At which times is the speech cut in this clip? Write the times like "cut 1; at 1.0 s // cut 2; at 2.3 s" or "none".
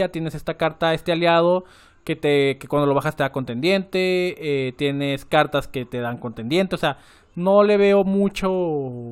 none